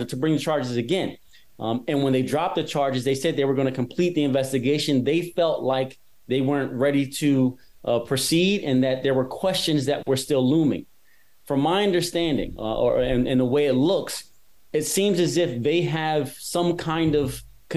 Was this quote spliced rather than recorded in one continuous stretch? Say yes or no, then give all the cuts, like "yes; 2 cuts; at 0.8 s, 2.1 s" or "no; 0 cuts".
no; 0 cuts